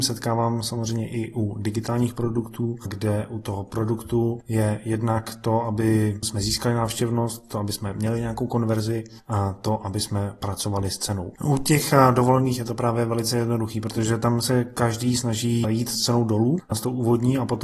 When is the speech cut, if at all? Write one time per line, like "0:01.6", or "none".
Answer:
0:11.4